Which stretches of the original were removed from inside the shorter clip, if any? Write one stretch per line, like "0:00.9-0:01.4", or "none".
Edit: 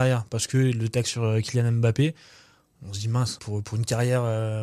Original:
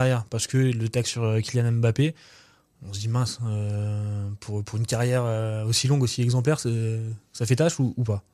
0:03.4-0:04.4